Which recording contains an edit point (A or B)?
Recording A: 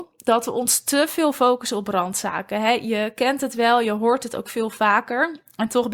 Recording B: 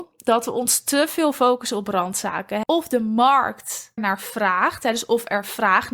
B